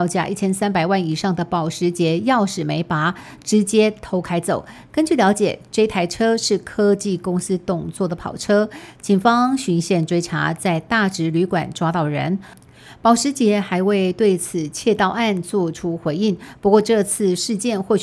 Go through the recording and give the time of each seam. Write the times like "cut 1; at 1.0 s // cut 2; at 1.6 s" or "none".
none